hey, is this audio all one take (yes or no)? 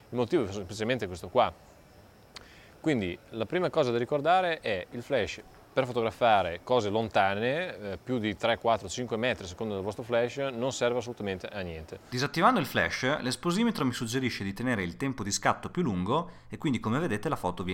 yes